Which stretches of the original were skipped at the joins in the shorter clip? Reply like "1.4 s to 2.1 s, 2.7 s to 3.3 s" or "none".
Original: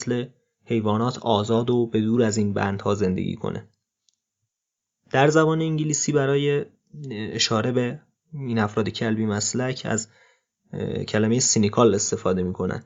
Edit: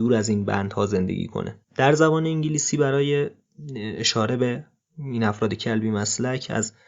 3.7 s to 5.0 s